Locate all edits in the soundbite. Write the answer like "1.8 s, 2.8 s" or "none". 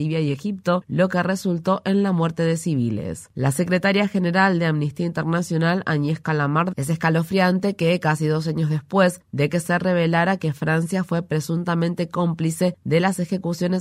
3.3 s, 6.7 s